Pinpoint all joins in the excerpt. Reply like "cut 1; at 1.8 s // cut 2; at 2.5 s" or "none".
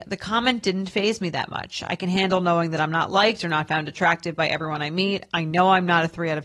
none